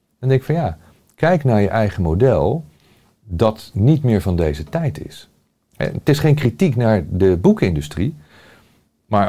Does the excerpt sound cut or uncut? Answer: uncut